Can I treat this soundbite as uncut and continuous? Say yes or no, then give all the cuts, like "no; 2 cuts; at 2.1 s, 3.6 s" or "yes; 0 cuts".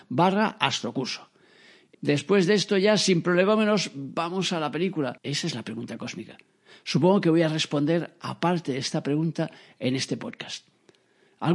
no; 2 cuts; at 1.9 s, 5.2 s